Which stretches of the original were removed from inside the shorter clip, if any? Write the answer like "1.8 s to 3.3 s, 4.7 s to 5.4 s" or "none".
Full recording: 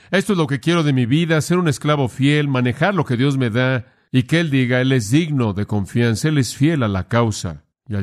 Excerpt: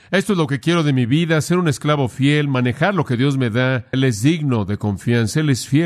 3.9 s to 4.8 s